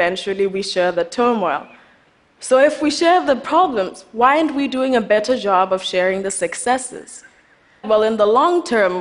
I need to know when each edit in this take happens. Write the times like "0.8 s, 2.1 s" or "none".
7.8 s

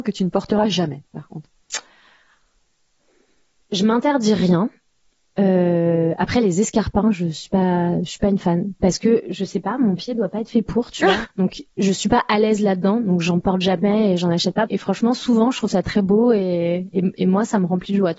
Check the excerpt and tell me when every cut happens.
11.3 s, 14.7 s

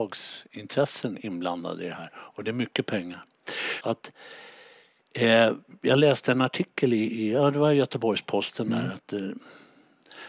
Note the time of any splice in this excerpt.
3.8 s

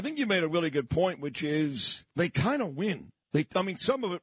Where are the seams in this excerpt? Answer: 3.1 s

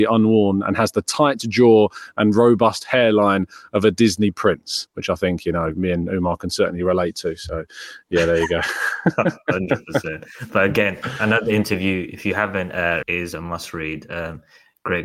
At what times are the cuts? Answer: 4.9 s, 13.0 s

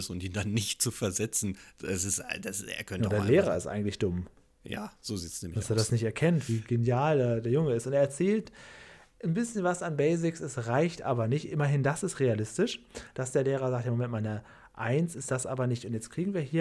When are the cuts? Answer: none

